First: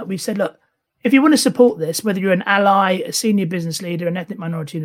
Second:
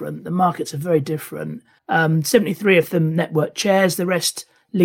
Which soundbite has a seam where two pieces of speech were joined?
second; 1 cut; at 1.8 s

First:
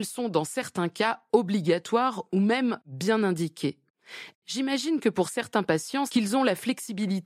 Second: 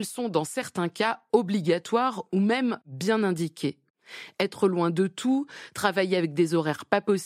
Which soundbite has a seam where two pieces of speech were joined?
first; 2 cuts; at 4.3 s, 6.1 s

